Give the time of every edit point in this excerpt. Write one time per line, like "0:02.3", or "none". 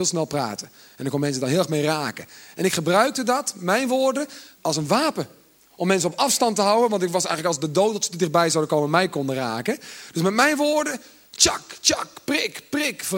0:04.6